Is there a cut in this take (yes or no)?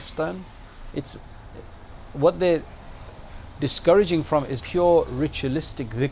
yes